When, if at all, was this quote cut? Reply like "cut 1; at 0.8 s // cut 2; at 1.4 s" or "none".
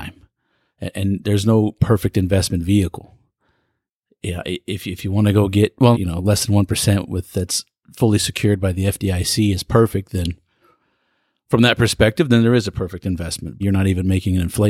cut 1; at 5.9 s // cut 2; at 13.6 s